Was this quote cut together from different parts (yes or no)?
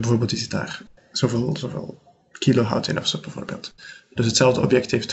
no